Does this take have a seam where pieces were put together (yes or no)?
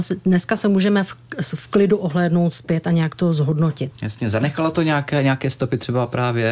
yes